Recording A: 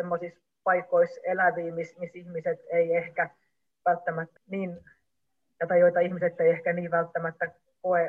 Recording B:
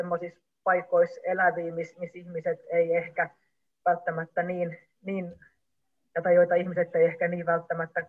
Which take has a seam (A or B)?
A